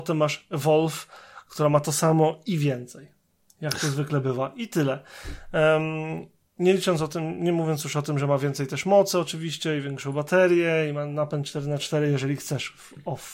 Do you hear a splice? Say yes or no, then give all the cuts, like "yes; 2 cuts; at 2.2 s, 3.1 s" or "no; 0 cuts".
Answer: no; 0 cuts